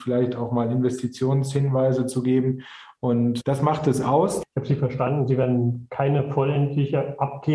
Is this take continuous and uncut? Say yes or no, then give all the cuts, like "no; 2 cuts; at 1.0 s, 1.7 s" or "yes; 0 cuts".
no; 2 cuts; at 3.4 s, 4.4 s